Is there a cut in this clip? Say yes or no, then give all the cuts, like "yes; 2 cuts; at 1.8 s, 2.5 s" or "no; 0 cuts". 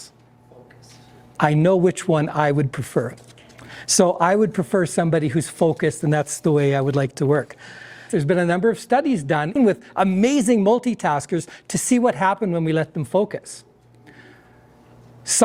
yes; 2 cuts; at 8.1 s, 9.6 s